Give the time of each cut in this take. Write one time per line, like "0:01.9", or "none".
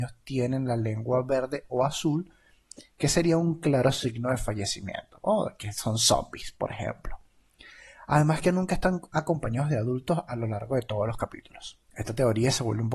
0:11.8